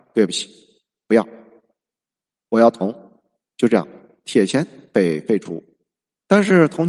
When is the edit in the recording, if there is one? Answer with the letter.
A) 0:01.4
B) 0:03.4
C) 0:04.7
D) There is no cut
D